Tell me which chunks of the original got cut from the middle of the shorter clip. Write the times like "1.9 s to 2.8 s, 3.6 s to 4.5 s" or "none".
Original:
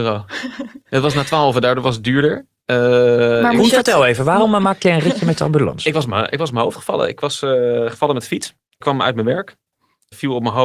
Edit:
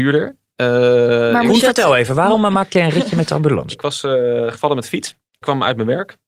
5.8 s to 7.1 s